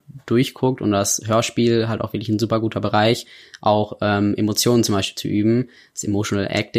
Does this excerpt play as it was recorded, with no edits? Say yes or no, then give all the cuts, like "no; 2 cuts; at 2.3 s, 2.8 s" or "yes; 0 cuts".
yes; 0 cuts